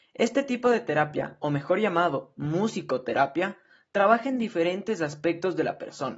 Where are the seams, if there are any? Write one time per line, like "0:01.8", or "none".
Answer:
none